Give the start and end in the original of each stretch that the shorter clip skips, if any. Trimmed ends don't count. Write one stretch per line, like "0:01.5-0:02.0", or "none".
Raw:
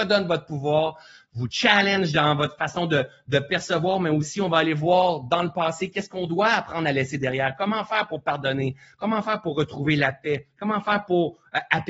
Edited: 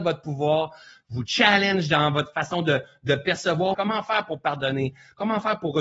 0:04.0-0:07.6